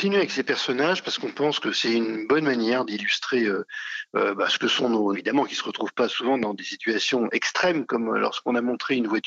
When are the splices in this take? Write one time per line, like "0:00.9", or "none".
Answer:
0:05.1